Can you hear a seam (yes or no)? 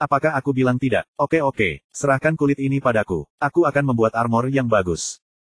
no